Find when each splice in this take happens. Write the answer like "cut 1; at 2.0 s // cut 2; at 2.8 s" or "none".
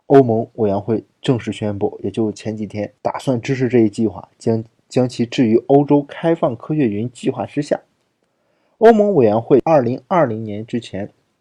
cut 1; at 3.0 s